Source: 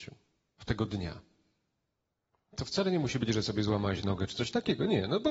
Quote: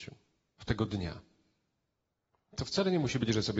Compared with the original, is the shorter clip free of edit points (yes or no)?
yes